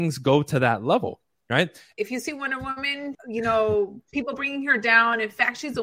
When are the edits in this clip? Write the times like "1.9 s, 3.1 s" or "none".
1.9 s, 3.1 s